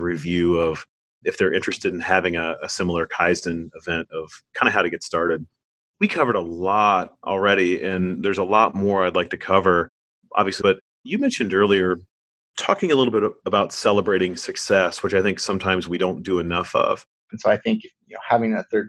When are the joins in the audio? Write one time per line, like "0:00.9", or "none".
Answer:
0:10.6
0:17.3